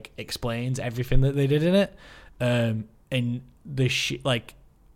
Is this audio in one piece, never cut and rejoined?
yes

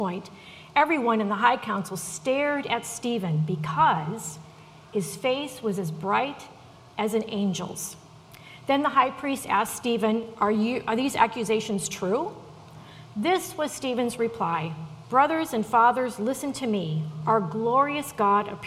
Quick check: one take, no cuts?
yes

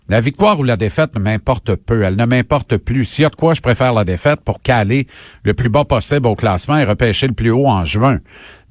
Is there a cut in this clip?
no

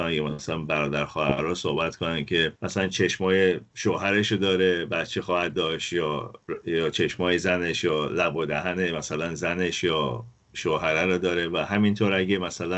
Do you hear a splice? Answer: no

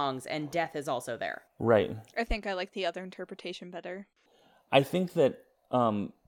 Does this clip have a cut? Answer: yes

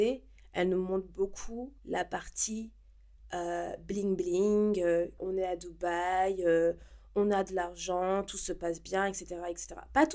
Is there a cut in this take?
yes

